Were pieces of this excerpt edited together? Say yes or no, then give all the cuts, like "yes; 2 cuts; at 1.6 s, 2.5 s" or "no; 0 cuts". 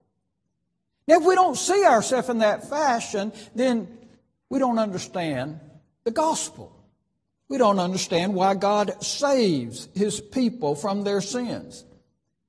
no; 0 cuts